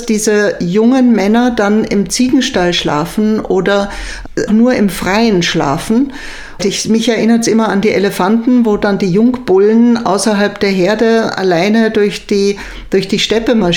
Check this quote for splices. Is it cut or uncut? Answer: cut